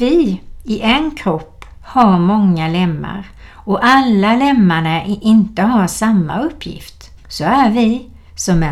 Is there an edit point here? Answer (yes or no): yes